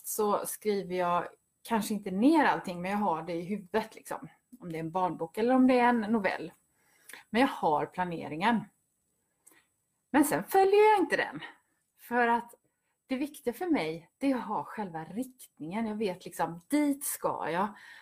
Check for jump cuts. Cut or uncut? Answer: uncut